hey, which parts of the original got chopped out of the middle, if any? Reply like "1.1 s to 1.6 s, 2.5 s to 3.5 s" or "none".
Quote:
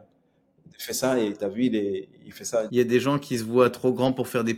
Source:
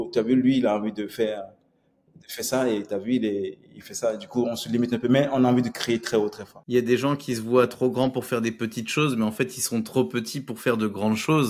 4.2 s to 6.6 s